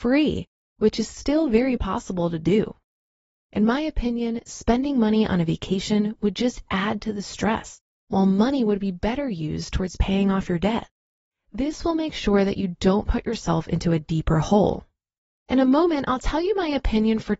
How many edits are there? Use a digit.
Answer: 0